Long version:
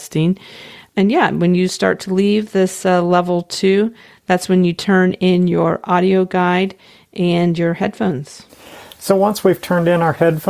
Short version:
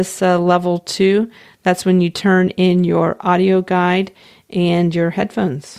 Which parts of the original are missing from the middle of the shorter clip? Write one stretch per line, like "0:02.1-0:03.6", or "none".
none